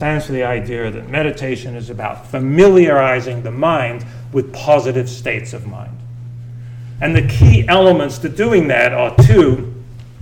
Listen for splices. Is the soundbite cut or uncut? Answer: cut